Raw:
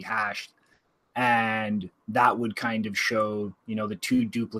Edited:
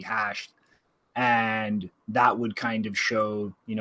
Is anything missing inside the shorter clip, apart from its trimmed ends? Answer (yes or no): no